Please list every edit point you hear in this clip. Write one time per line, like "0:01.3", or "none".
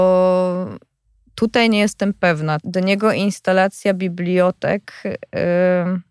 0:02.6